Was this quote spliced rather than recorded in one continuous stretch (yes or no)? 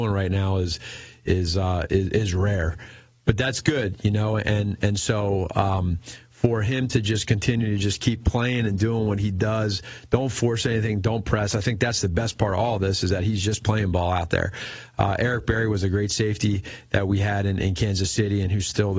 no